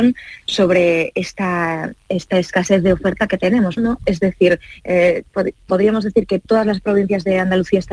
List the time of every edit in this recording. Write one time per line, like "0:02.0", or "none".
0:03.8